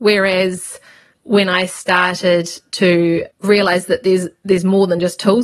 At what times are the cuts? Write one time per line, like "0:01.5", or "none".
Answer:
none